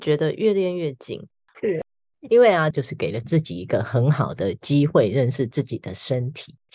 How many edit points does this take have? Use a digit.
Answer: 2